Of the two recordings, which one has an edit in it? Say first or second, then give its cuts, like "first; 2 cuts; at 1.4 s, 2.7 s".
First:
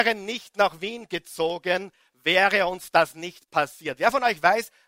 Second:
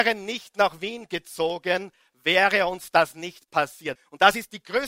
second; 1 cut; at 4.0 s